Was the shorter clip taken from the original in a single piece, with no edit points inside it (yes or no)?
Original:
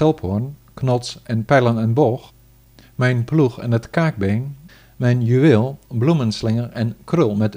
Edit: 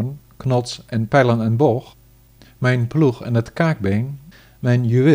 yes